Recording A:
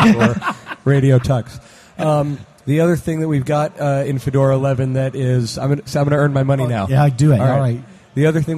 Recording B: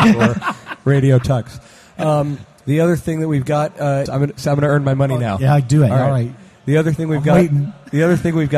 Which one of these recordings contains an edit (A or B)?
B